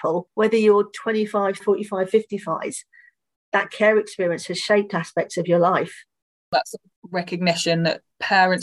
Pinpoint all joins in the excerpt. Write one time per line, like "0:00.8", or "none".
0:01.6